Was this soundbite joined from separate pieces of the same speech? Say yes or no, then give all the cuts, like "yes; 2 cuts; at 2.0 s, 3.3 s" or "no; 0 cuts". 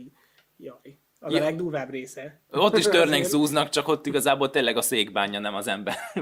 no; 0 cuts